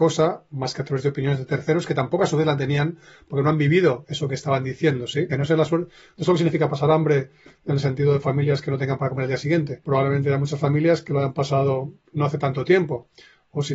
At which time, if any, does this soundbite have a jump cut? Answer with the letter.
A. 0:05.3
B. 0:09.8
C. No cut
A